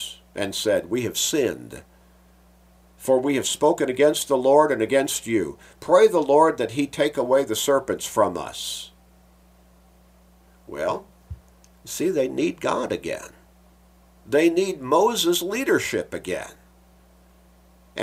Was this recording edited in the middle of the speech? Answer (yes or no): no